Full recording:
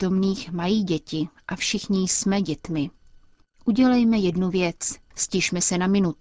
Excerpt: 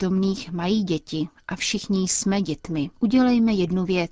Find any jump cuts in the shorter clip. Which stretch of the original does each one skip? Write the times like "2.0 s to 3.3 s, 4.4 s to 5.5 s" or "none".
3.0 s to 3.6 s